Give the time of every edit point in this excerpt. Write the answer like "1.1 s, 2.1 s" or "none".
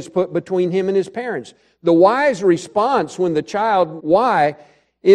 4.0 s

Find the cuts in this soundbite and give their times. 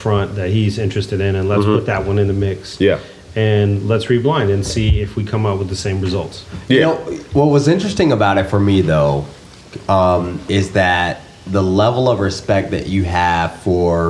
none

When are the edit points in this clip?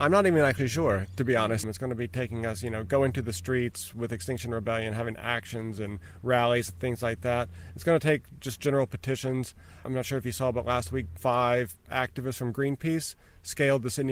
1.6 s

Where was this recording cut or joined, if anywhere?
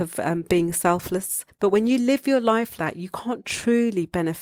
2.8 s

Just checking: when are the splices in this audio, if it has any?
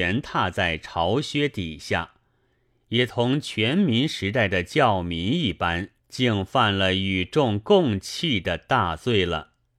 2.8 s, 6.0 s

